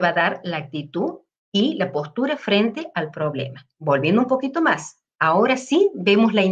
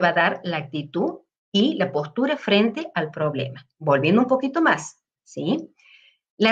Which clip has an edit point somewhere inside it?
second; 1 cut; at 5.2 s

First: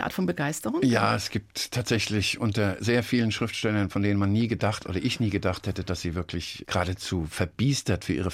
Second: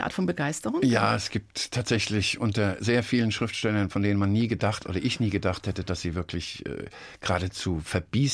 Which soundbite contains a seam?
first; 1 cut; at 6.6 s

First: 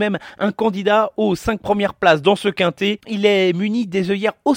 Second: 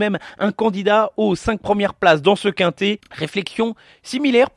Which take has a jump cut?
first; 1 cut; at 3.0 s

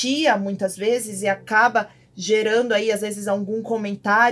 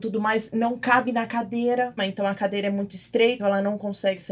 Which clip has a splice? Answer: second; 2 cuts; at 2.0 s, 3.4 s

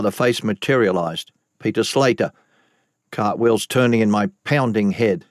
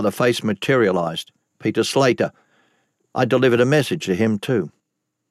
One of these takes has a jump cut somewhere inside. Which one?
first; 1 cut; at 2.9 s

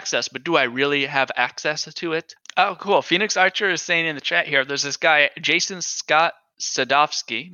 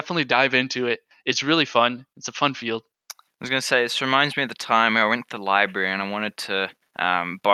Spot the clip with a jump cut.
first; 1 cut; at 2.4 s

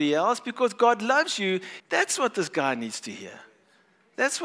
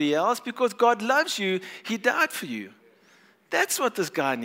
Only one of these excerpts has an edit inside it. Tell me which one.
first; 1 cut; at 1.8 s

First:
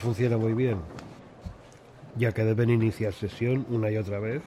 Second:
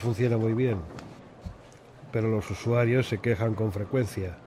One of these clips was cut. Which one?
first; 1 cut; at 2.1 s

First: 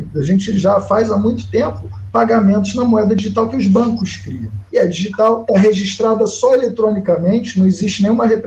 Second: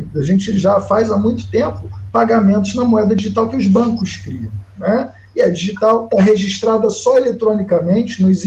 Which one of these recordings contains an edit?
first; 1 cut; at 4.7 s

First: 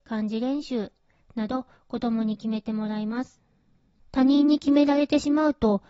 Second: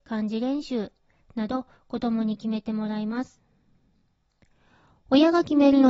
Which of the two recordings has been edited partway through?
first; 1 cut; at 4.0 s

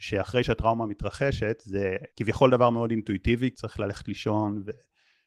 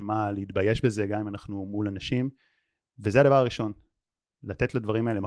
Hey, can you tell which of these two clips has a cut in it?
first; 2 cuts; at 2.1 s, 3.5 s

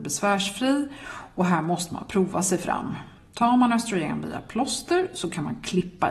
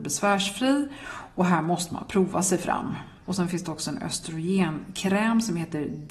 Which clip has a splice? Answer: second; 1 cut; at 3.2 s

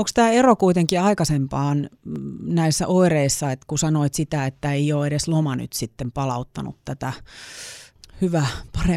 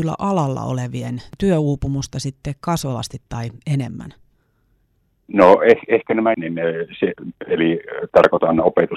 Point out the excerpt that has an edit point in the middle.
second; 1 cut; at 6.3 s

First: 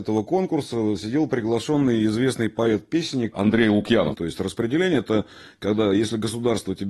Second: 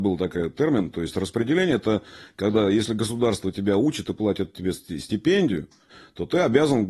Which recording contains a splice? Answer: first; 1 cut; at 4.1 s

